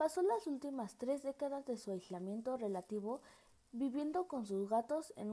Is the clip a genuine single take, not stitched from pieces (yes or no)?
yes